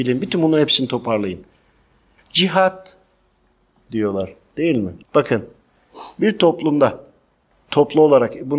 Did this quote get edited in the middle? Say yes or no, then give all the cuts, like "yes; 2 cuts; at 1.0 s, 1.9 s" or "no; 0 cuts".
yes; 2 cuts; at 2.2 s, 5.0 s